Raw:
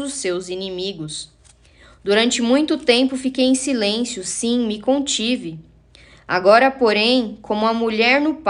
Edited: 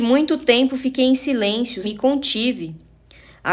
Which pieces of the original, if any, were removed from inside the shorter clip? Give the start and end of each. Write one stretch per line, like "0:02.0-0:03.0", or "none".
0:04.2-0:04.7

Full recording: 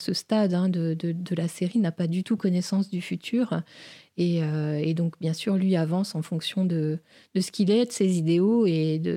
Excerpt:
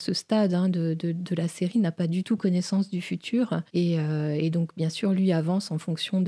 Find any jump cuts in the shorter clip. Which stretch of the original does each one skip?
0:03.7-0:04.1

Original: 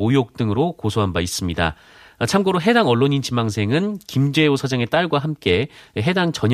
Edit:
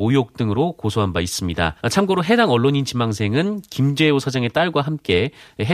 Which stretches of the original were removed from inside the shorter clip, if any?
0:01.8-0:02.2

